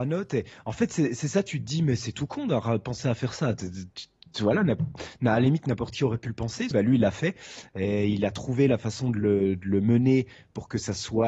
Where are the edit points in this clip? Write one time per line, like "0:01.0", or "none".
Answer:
0:06.7